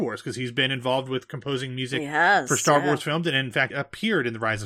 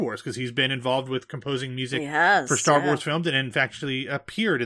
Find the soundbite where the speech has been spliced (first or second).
first